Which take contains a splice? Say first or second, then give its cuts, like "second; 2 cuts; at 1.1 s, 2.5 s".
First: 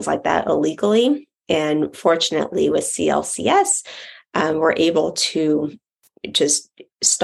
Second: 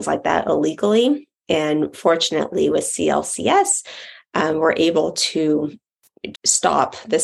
second; 1 cut; at 6.3 s